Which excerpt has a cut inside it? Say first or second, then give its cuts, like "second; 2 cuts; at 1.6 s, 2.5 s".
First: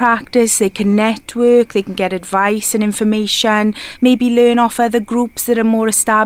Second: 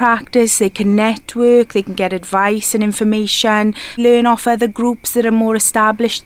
second; 1 cut; at 4.0 s